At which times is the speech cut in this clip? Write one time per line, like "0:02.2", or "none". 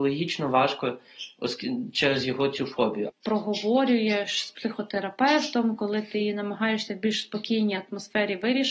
0:03.1